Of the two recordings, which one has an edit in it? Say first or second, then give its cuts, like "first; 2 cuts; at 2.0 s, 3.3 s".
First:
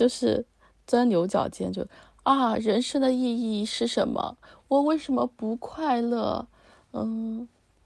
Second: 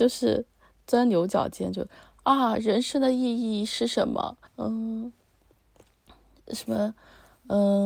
second; 1 cut; at 4.5 s